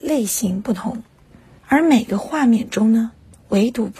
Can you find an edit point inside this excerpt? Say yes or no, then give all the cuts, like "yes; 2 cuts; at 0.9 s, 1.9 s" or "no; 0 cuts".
yes; 1 cut; at 1.6 s